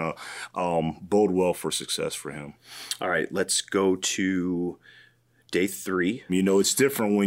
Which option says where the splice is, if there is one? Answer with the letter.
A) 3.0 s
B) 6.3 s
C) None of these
B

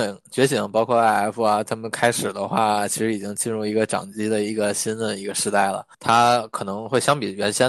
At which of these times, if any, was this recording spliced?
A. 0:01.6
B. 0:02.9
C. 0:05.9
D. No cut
C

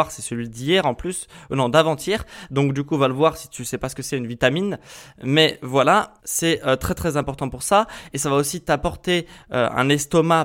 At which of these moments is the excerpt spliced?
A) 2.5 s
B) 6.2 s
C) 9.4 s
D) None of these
B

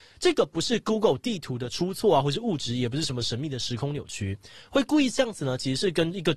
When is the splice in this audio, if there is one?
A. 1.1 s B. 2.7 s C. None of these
C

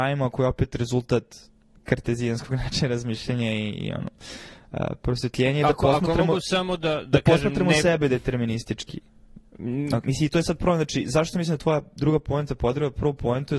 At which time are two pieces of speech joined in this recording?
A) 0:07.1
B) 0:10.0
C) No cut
B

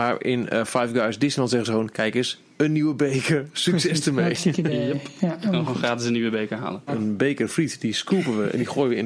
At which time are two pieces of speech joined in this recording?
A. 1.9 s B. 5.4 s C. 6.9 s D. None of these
C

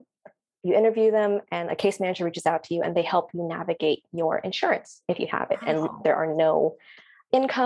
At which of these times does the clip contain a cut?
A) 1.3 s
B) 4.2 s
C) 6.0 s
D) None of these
C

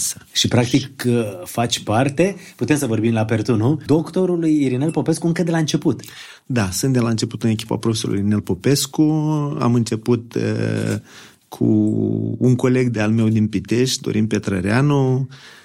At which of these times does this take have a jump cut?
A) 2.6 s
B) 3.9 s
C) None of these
B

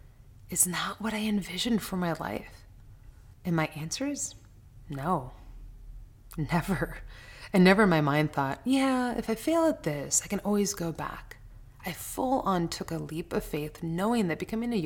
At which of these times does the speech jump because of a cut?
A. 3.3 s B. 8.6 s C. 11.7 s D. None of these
A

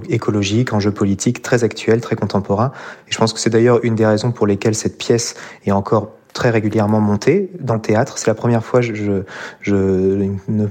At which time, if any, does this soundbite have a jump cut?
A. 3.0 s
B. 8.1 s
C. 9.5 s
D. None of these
D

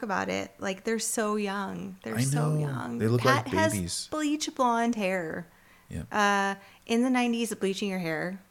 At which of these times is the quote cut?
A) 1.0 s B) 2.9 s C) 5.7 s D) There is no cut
D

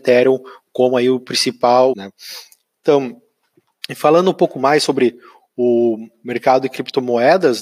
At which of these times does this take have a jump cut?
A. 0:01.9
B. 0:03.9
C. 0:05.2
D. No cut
A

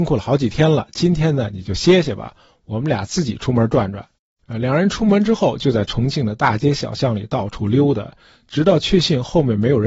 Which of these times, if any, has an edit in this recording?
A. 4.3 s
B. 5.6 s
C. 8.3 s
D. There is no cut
D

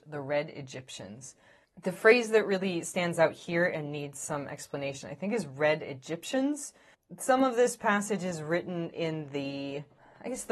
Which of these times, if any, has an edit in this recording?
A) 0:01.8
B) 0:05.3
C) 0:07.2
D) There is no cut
D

